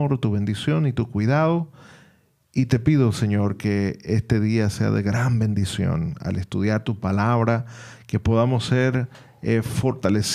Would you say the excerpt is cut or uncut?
uncut